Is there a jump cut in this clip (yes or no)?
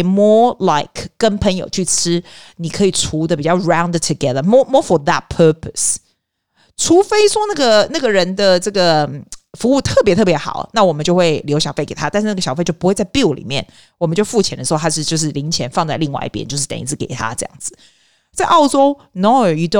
no